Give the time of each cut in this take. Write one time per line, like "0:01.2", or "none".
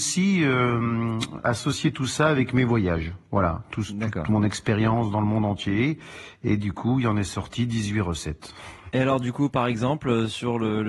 none